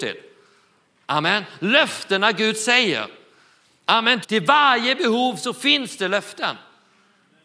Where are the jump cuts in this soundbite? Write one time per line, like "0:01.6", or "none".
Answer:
0:04.2